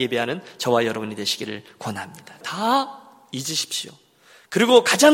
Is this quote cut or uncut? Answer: cut